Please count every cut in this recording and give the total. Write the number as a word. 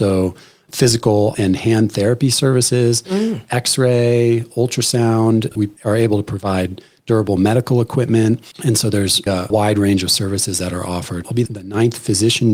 three